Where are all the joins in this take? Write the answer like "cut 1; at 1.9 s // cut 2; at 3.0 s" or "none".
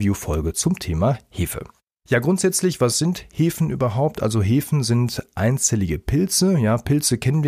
none